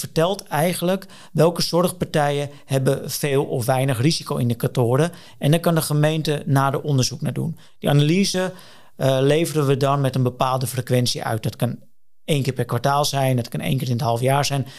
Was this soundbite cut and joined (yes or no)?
no